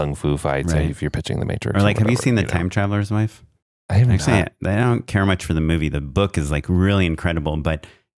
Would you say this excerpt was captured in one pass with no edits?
yes; 0 cuts

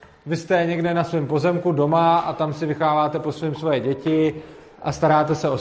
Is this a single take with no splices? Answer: yes; 0 cuts

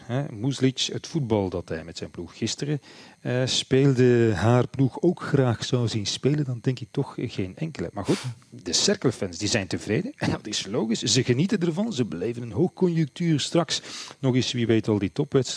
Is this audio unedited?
yes; 0 cuts

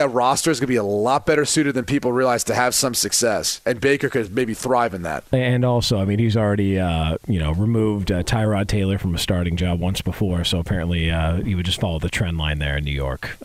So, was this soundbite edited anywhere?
no; 0 cuts

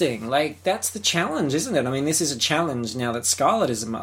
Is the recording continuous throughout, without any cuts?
yes; 0 cuts

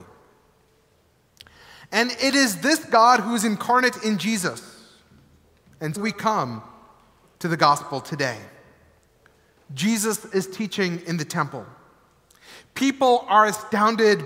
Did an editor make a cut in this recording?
yes; 1 cut; at 6.0 s

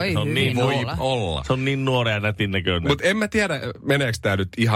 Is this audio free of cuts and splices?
yes; 0 cuts

